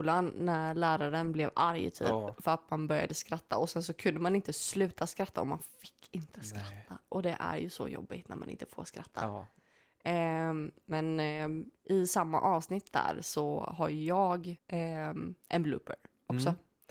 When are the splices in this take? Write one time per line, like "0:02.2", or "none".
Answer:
0:14.6